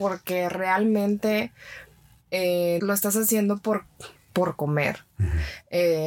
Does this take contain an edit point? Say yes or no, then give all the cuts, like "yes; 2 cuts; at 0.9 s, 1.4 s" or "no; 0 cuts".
yes; 2 cuts; at 2.8 s, 4.2 s